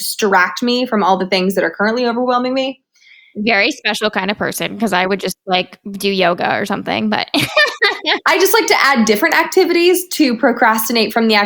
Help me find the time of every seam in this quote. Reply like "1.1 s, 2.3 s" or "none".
none